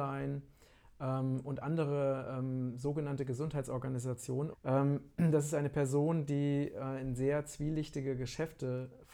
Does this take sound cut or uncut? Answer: cut